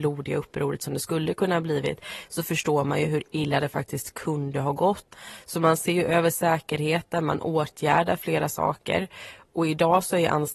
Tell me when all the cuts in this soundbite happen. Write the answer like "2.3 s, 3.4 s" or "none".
none